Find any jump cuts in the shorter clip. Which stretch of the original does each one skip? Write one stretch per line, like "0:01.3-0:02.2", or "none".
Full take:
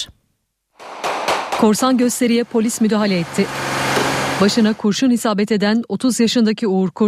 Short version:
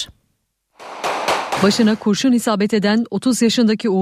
0:01.6-0:04.3